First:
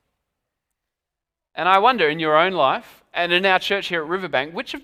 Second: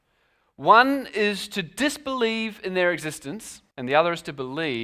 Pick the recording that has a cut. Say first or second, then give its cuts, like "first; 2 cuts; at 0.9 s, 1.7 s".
second; 1 cut; at 3.7 s